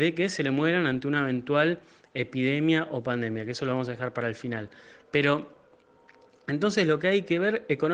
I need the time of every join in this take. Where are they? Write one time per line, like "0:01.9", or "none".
none